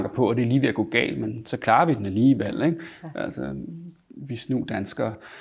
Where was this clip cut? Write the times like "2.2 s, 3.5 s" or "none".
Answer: none